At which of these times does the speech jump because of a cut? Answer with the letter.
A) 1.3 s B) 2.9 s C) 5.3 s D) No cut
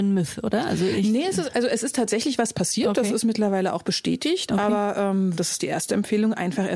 C